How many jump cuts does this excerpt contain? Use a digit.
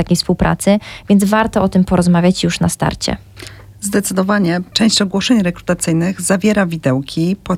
1